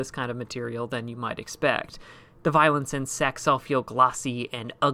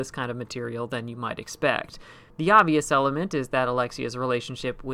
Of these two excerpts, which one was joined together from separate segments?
second; 1 cut; at 2.3 s

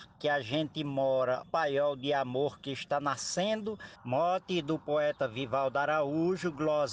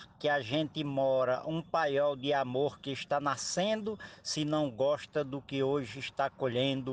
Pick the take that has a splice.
first; 2 cuts; at 1.4 s, 4.0 s

